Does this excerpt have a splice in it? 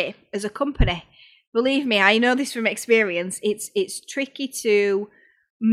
no; 0 cuts

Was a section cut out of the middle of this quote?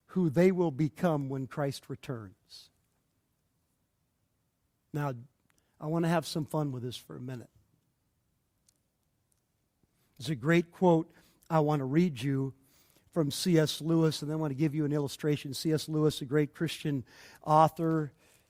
no; 0 cuts

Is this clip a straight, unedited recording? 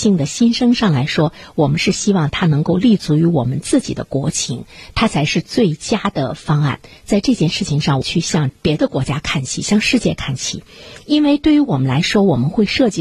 no; 1 cut; at 8.0 s

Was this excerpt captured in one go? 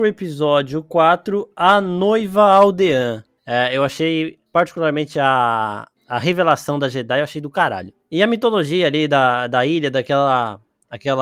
yes; 0 cuts

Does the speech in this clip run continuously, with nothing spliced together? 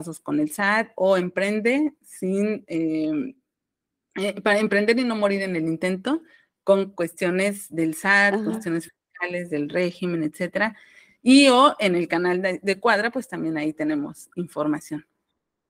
yes; 0 cuts

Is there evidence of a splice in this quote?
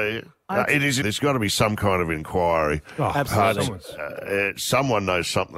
yes; 1 cut; at 1.0 s

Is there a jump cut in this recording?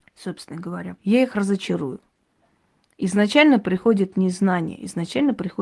yes; 1 cut; at 1.0 s

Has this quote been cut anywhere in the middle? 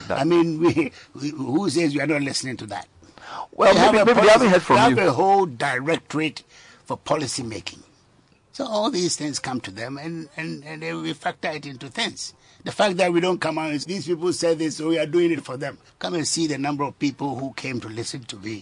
yes; 2 cuts; at 13.8 s, 15.9 s

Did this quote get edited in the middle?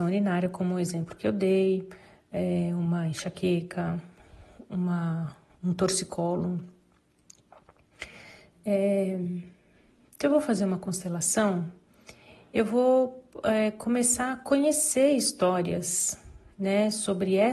no; 0 cuts

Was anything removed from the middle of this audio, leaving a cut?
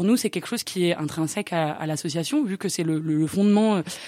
no; 0 cuts

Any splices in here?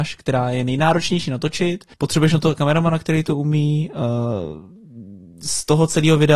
yes; 1 cut; at 1.9 s

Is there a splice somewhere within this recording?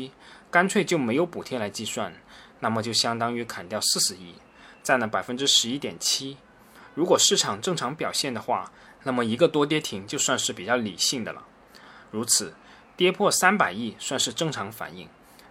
no; 0 cuts

